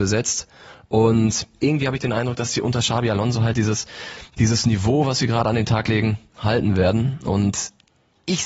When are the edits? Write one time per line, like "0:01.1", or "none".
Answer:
none